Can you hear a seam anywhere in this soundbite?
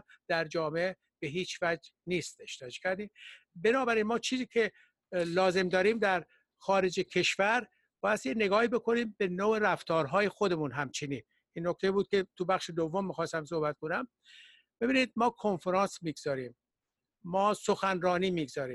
no; 0 cuts

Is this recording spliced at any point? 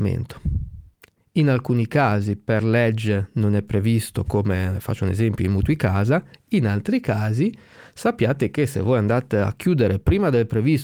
no; 0 cuts

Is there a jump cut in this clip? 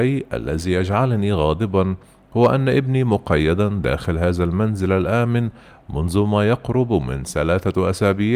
no; 0 cuts

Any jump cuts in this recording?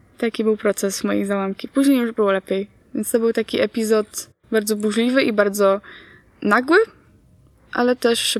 no; 0 cuts

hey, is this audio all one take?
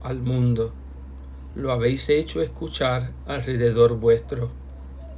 yes; 0 cuts

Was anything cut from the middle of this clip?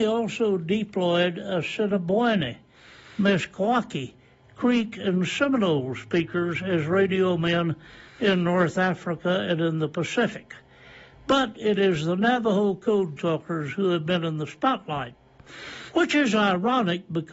no; 0 cuts

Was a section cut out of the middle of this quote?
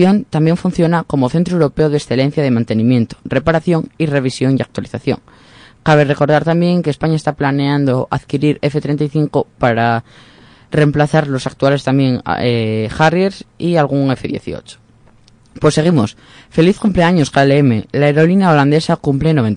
no; 0 cuts

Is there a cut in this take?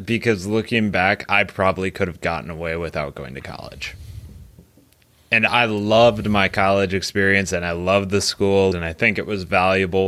yes; 1 cut; at 8.7 s

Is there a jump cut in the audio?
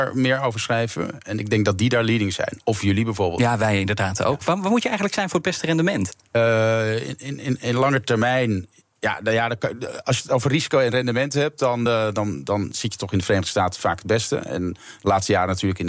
no; 0 cuts

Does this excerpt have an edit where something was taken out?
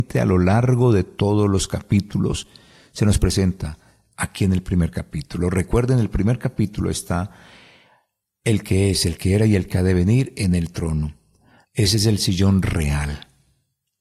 yes; 1 cut; at 11.6 s

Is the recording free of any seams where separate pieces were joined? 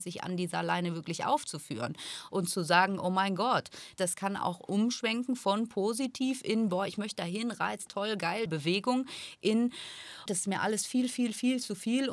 no; 3 cuts; at 4.0 s, 8.5 s, 10.3 s

